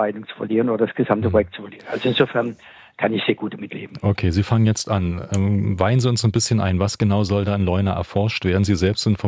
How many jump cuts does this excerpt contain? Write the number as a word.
zero